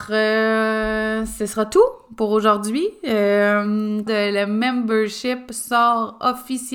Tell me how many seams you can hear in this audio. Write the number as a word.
one